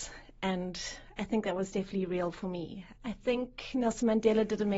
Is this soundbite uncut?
no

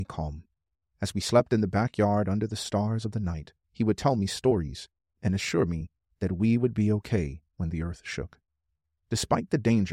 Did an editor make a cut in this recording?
yes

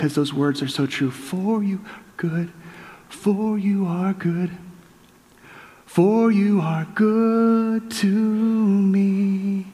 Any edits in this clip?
no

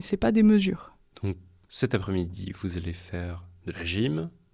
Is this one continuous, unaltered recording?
no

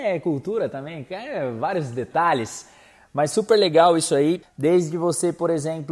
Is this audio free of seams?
no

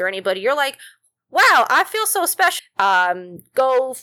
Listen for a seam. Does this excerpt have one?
yes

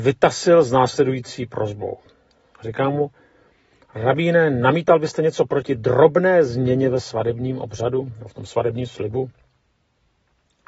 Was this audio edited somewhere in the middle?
no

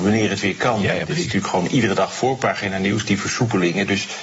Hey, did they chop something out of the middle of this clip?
no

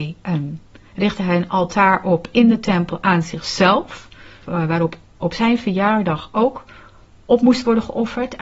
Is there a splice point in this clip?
yes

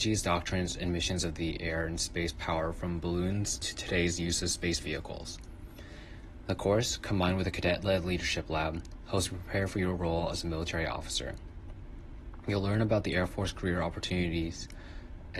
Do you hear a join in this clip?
no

